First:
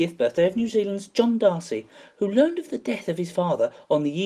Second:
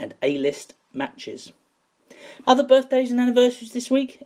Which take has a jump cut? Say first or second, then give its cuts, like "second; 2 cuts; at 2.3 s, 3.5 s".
second; 1 cut; at 2.4 s